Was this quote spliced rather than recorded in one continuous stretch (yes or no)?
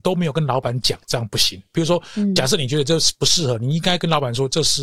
no